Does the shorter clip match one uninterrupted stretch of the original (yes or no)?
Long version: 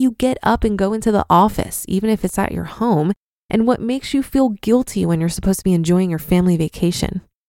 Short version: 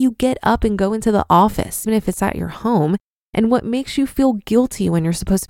no